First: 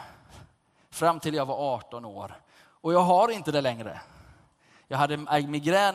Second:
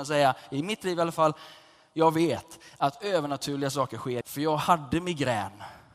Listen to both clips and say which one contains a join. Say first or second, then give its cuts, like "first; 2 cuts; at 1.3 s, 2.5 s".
second; 1 cut; at 4.2 s